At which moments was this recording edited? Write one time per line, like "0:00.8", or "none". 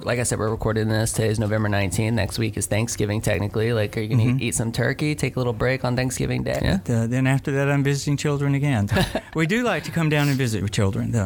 0:06.6
0:08.9